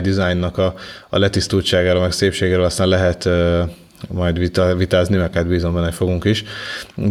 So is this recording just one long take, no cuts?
yes; 0 cuts

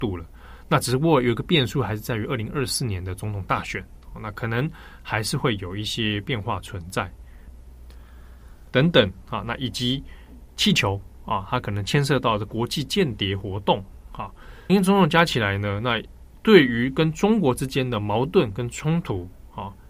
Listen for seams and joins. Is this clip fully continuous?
no; 2 cuts; at 8.7 s, 14.7 s

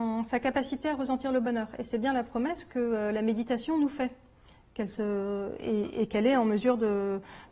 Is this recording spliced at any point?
no; 0 cuts

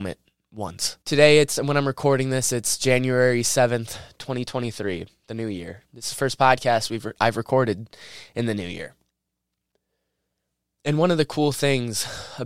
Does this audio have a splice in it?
yes; 1 cut; at 1.0 s

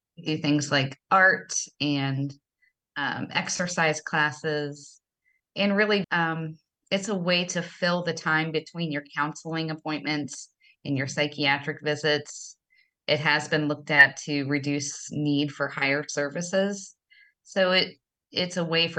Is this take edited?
yes; 1 cut; at 6.0 s

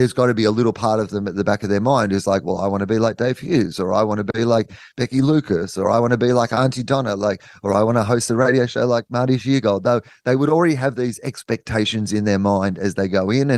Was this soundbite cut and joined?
no; 0 cuts

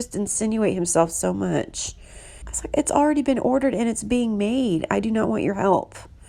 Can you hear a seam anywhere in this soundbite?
yes; 1 cut; at 2.4 s

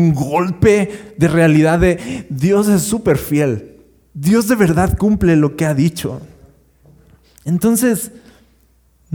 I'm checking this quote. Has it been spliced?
no; 0 cuts

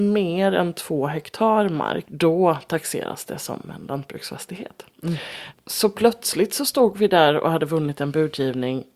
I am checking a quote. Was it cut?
yes; 2 cuts; at 2.1 s, 5.5 s

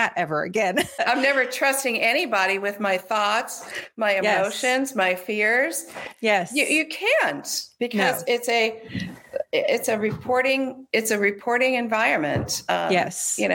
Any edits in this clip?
yes; 1 cut; at 1.0 s

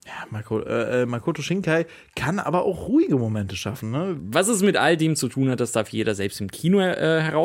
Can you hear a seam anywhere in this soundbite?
yes; 1 cut; at 4.2 s

